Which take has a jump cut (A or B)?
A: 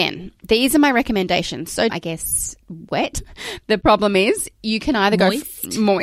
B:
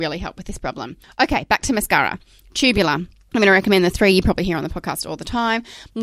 A